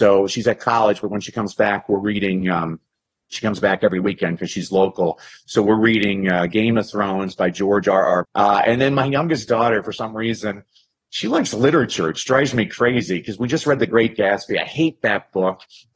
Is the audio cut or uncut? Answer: cut